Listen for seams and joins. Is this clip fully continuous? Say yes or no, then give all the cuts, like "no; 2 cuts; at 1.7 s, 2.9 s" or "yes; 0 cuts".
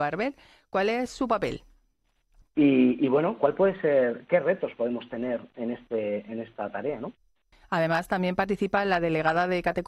no; 1 cut; at 2.4 s